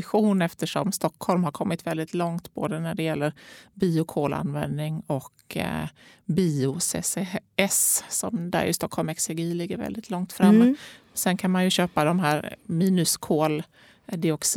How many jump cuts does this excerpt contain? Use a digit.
0